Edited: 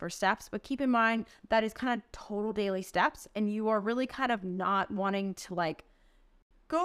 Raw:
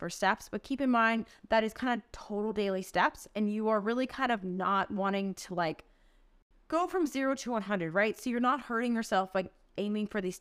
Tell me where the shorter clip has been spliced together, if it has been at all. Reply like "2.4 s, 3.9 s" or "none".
none